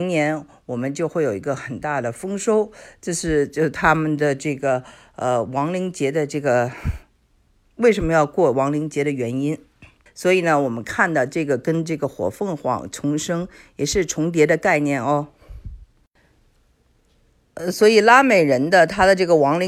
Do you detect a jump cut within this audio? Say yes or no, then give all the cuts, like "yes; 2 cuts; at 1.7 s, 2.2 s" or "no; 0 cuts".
yes; 1 cut; at 10.1 s